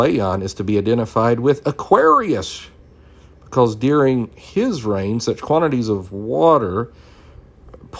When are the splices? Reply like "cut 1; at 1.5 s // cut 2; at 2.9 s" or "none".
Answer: none